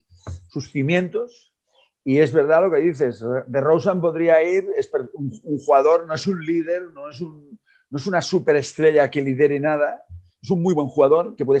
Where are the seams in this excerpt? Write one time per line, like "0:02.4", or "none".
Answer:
none